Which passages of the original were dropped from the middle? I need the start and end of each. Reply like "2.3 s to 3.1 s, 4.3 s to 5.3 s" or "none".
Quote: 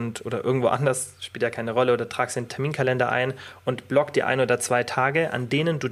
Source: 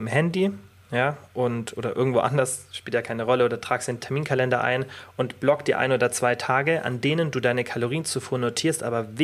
none